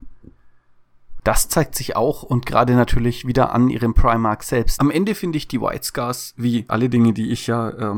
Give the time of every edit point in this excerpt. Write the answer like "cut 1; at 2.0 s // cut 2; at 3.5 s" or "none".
cut 1; at 1.2 s // cut 2; at 4.8 s // cut 3; at 6.7 s